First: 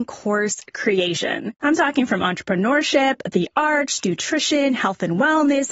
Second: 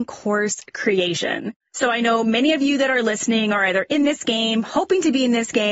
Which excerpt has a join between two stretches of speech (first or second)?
first